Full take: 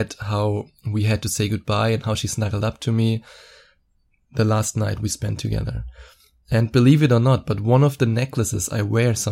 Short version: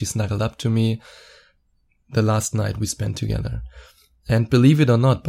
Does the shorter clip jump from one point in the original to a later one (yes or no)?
no